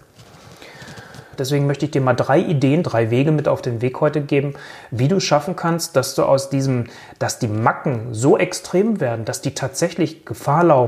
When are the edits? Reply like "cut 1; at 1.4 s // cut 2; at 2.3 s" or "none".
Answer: cut 1; at 1.4 s // cut 2; at 2.8 s